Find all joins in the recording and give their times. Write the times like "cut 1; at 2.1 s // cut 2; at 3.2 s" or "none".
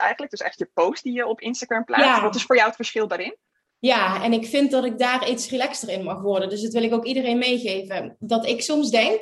none